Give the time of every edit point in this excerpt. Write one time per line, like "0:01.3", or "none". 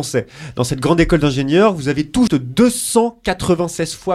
0:02.3

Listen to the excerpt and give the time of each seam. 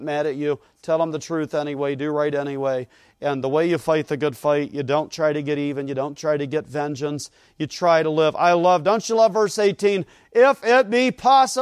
none

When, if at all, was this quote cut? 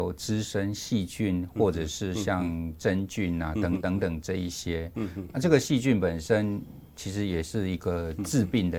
0:03.8
0:05.3

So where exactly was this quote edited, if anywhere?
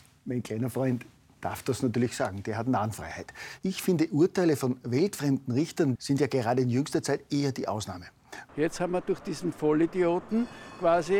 0:03.6
0:06.0
0:08.5

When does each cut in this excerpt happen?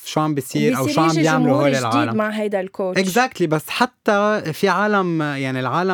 none

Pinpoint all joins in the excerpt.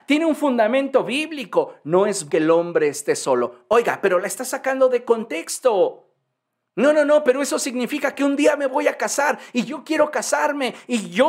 0:02.3

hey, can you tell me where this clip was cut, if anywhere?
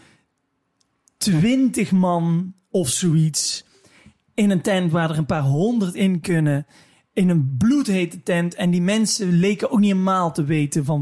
none

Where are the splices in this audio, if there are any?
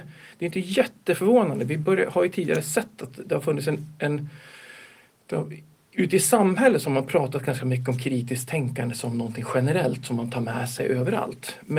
none

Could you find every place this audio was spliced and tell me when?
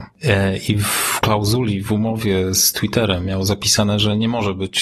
none

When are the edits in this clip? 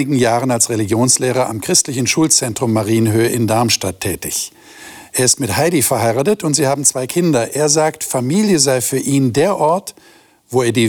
none

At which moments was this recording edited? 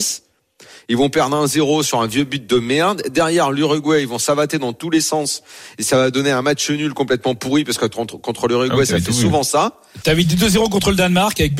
none

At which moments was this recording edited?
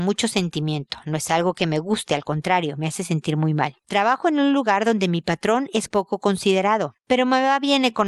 0:03.8
0:05.9
0:07.0

